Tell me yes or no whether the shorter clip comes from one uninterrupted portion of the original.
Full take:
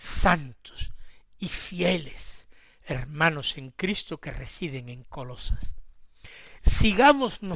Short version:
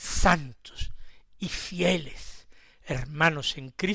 yes